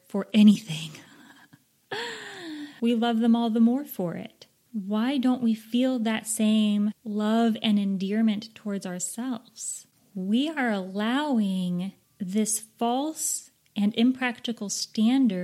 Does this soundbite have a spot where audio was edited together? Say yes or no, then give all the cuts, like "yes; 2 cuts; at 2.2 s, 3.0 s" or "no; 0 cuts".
yes; 1 cut; at 2.8 s